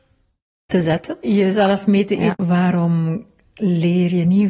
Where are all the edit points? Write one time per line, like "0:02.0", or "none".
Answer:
0:01.2
0:02.3

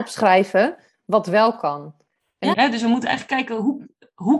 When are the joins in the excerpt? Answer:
0:02.5

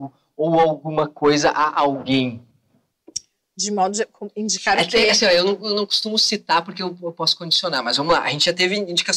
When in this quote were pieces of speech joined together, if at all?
none

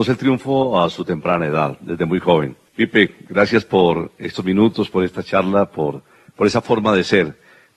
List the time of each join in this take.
0:02.7

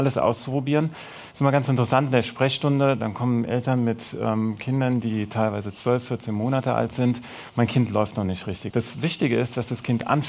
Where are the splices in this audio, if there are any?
0:08.7

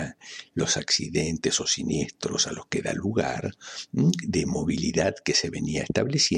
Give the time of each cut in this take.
0:04.2

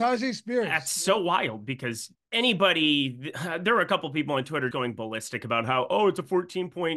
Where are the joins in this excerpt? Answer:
0:02.1
0:04.7

